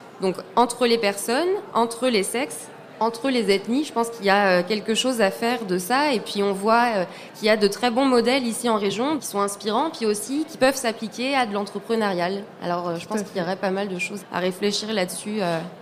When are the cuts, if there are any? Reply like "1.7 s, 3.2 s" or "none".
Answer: 9.2 s, 14.2 s